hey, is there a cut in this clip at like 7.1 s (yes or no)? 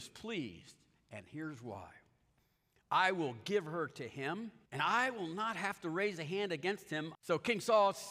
yes